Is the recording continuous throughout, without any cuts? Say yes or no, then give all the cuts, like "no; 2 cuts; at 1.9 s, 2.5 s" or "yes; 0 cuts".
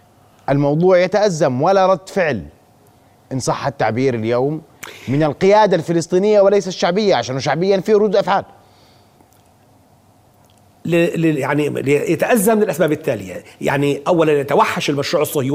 yes; 0 cuts